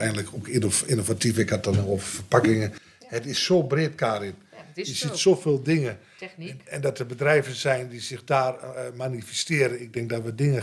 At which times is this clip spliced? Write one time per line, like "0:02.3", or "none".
none